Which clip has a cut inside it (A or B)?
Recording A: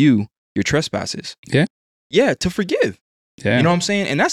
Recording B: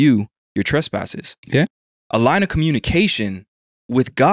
A